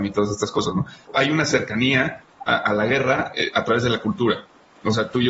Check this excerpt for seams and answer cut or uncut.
cut